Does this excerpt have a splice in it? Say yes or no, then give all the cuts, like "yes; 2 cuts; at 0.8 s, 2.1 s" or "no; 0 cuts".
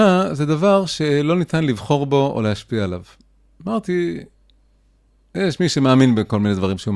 no; 0 cuts